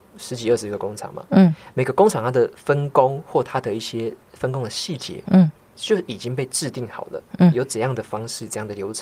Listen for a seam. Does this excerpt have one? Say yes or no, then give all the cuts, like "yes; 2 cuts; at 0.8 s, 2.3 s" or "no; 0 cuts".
no; 0 cuts